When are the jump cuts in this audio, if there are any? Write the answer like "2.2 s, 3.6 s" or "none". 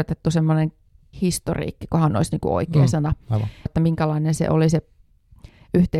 1.1 s, 3.7 s